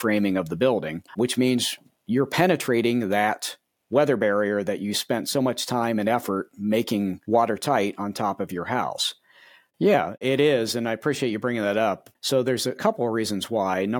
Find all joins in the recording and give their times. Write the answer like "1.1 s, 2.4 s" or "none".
1.1 s, 9.7 s

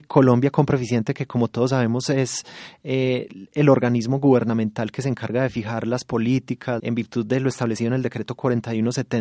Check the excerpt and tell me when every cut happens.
6.8 s

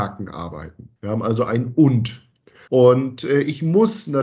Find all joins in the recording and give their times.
1.0 s, 2.7 s

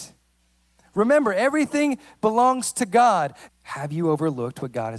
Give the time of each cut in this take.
3.5 s

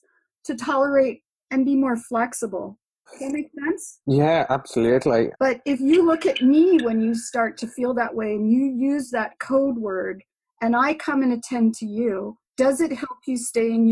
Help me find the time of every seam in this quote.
3.1 s, 5.3 s, 12.5 s

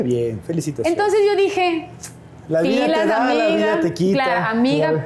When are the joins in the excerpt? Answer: 2.4 s

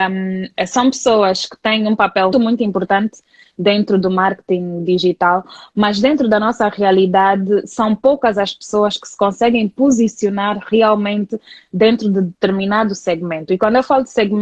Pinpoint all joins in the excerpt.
2.3 s

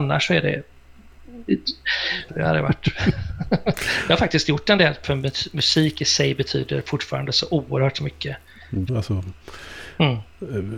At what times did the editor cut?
2.3 s, 5.0 s, 8.9 s

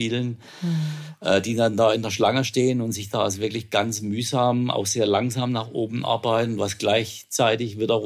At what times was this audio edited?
none

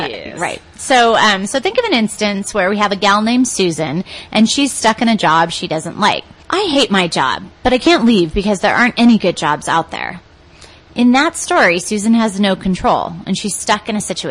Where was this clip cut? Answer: 6.4 s

